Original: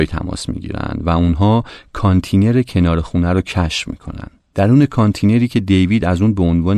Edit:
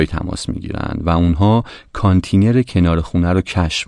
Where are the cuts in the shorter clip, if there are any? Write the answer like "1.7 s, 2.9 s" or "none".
none

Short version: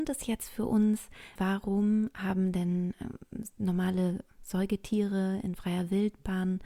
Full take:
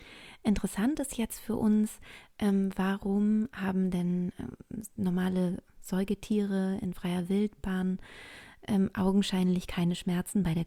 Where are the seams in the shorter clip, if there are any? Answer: 1.4 s

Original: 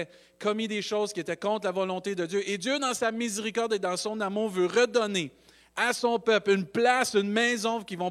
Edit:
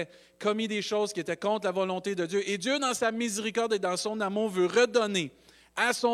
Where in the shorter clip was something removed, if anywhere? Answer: none

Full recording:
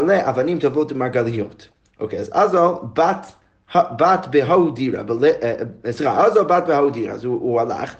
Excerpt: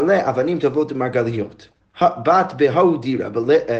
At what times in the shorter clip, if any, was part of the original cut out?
1.8 s

